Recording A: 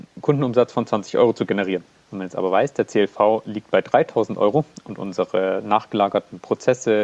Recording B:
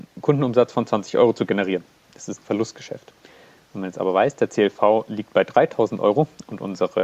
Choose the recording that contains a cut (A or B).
A